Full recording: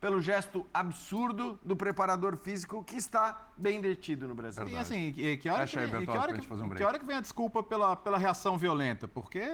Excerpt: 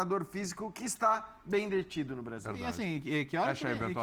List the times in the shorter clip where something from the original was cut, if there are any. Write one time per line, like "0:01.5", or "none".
none